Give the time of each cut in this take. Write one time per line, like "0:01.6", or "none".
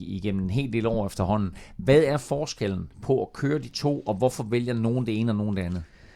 none